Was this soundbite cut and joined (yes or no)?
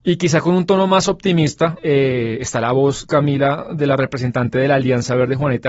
yes